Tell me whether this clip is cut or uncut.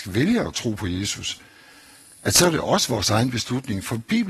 uncut